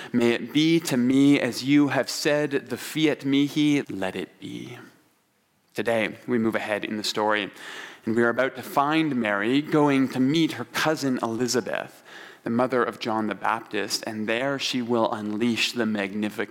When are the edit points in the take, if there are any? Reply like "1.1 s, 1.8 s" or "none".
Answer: 3.8 s